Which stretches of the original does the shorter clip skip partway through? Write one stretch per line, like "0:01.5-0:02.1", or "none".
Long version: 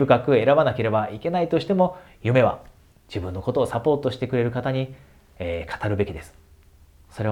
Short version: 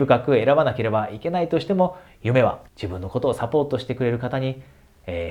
0:02.7-0:03.0